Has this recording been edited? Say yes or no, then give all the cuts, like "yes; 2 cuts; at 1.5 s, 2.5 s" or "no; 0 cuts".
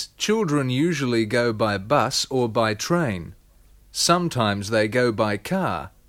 no; 0 cuts